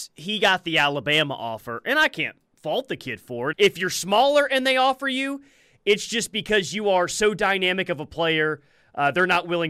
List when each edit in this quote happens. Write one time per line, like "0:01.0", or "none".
0:03.5